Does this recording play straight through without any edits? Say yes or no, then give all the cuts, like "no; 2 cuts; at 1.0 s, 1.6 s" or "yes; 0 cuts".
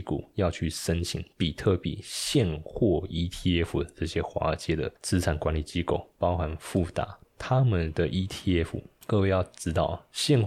no; 2 cuts; at 6.1 s, 7.2 s